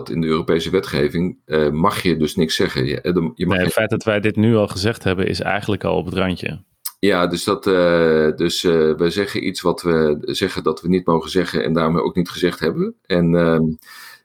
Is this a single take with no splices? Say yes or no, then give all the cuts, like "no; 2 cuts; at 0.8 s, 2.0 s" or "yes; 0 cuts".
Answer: yes; 0 cuts